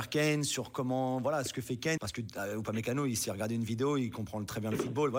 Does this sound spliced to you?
yes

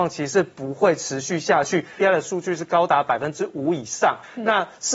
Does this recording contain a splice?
yes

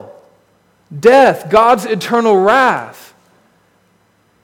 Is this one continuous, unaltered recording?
yes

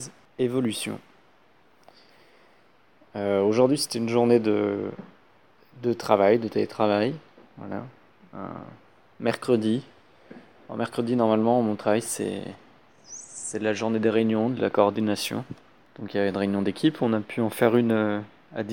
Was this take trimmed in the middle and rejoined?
no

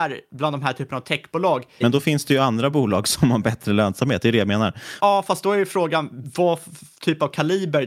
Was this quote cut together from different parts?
yes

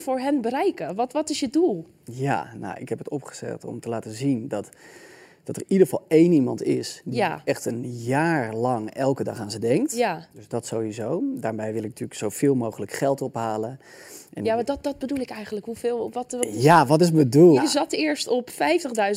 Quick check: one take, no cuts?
no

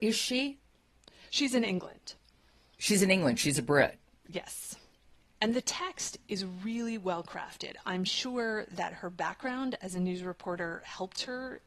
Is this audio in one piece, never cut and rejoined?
yes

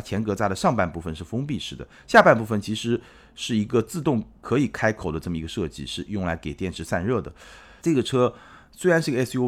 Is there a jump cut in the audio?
yes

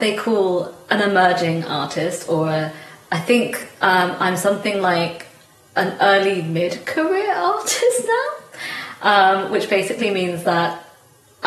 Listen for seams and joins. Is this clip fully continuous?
yes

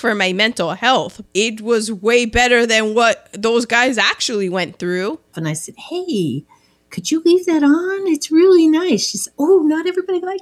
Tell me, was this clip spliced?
yes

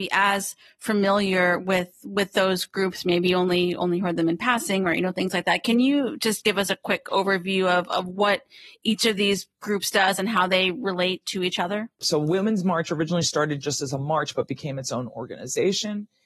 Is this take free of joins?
yes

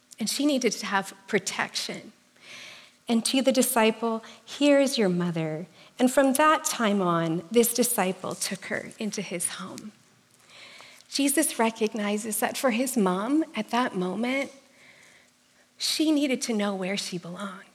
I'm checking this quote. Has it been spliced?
yes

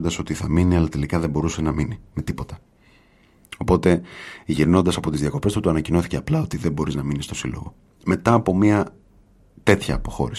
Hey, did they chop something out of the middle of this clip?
no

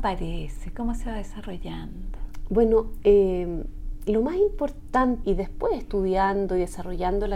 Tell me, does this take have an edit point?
yes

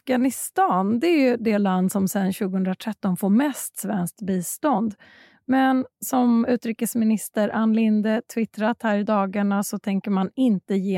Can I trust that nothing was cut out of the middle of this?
yes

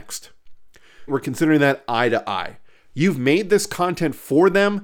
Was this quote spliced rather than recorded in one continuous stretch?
yes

